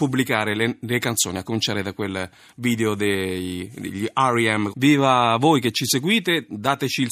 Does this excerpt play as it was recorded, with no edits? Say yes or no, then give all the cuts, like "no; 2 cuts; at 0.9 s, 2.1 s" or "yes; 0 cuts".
no; 1 cut; at 4.7 s